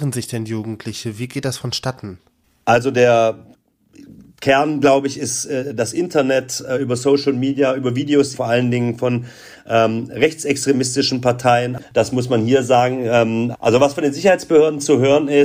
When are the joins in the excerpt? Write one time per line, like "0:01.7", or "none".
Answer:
0:08.3
0:11.8
0:13.5